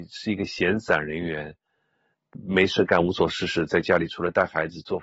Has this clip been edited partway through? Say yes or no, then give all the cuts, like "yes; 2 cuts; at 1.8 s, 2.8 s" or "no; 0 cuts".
no; 0 cuts